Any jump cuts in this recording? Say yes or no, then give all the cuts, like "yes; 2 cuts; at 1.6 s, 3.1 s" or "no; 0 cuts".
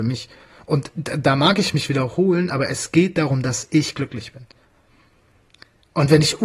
no; 0 cuts